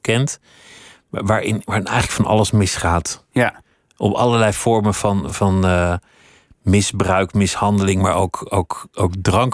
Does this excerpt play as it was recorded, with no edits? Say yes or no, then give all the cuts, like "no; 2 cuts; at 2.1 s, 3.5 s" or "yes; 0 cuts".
yes; 0 cuts